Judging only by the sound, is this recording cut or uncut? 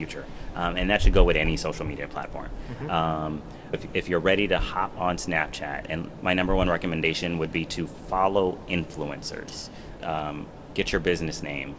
cut